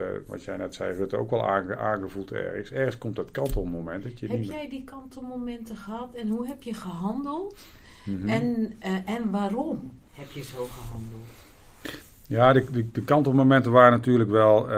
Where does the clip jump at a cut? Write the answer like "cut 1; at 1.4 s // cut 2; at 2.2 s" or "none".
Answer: none